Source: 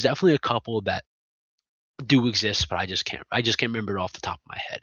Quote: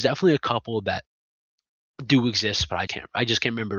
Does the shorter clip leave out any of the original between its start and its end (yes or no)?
yes